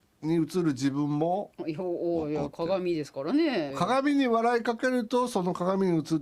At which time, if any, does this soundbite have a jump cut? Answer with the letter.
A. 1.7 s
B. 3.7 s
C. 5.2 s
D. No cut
B